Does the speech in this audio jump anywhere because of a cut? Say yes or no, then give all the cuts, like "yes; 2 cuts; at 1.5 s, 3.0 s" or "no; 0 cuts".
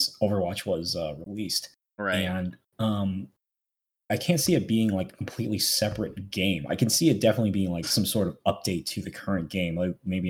yes; 1 cut; at 4.1 s